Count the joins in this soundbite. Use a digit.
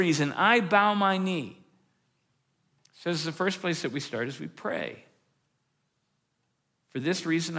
0